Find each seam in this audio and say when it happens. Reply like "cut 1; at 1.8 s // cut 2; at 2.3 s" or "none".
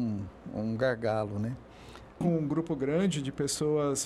cut 1; at 2.2 s